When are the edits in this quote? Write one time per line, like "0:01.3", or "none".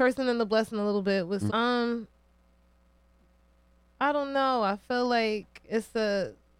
0:01.5